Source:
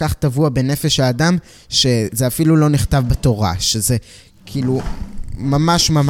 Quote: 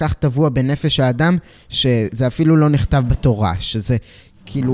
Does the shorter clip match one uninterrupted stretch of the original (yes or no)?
yes